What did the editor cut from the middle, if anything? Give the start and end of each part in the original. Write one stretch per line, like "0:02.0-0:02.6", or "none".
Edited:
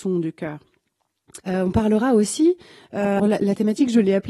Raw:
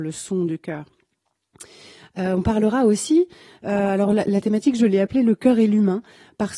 0:01.7-0:02.1
0:03.9-0:04.1